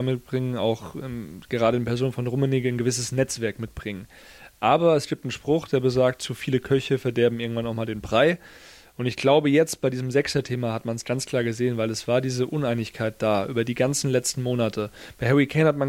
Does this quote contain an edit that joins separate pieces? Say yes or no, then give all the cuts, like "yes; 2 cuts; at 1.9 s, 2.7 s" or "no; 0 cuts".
no; 0 cuts